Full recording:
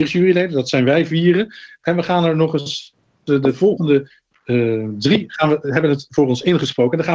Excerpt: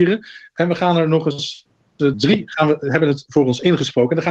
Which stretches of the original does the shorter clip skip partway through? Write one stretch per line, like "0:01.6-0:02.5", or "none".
0:03.4-0:05.0